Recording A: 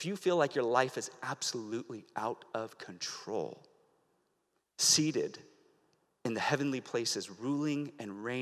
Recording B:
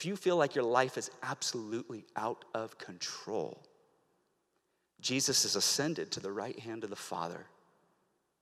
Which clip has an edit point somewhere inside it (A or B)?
A